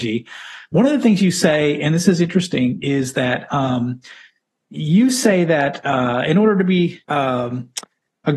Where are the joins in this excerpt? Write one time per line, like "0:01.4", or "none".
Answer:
0:07.0